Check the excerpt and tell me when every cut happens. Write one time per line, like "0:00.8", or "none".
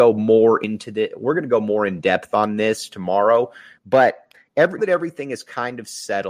0:03.8
0:04.8